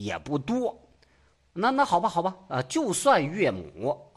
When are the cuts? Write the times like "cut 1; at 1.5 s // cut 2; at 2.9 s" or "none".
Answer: none